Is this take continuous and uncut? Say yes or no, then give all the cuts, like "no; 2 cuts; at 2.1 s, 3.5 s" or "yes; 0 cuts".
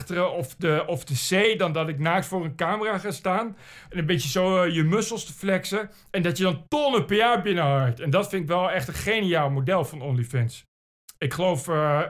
no; 1 cut; at 3.9 s